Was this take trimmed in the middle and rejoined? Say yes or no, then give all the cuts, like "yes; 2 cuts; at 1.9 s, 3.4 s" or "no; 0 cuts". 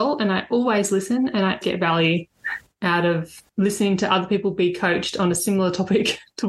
yes; 2 cuts; at 1.6 s, 3.5 s